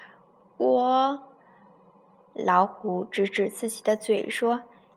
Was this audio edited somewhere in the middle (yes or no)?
no